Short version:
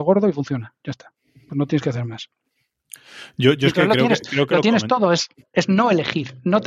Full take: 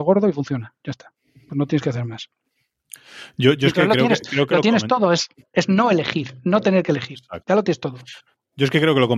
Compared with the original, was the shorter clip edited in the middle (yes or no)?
no